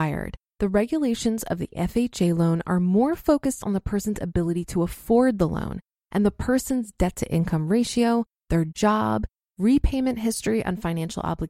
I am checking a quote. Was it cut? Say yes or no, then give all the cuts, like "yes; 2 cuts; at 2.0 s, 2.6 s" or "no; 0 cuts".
yes; 1 cut; at 9.5 s